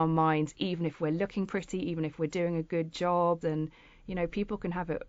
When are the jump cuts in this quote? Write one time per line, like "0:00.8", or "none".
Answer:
0:03.4